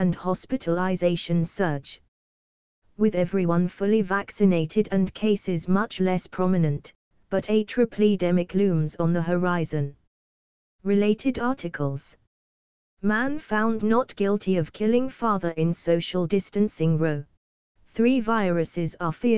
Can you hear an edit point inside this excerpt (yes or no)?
yes